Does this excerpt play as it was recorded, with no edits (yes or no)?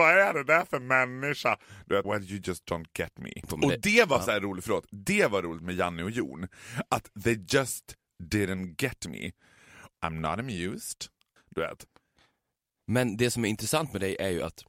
no